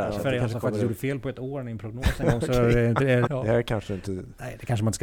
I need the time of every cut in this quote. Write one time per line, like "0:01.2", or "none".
0:03.3